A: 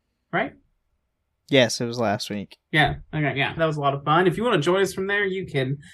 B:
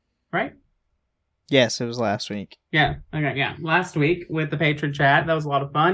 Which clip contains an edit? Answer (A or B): A